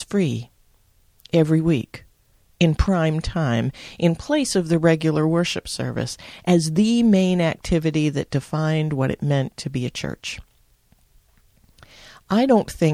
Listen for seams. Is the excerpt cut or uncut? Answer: uncut